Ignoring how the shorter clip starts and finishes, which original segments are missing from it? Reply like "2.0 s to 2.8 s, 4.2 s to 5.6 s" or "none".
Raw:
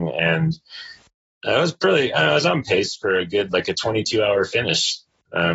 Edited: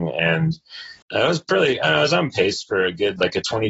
1.0 s to 1.3 s